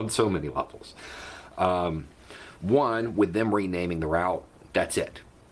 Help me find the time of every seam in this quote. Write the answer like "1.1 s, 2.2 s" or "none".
none